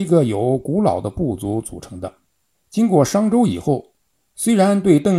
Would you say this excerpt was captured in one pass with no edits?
no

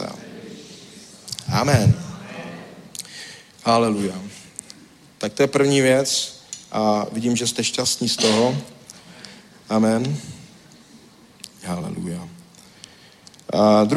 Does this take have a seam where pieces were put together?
no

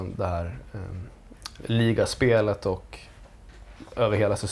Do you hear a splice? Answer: yes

